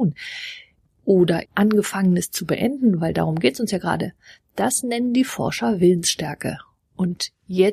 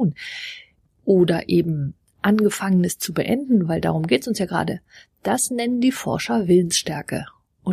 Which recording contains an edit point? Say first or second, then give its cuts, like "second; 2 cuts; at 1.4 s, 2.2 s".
first; 1 cut; at 1.5 s